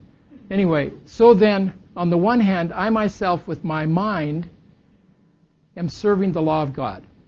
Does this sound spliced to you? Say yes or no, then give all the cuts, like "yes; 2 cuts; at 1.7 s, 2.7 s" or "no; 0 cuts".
no; 0 cuts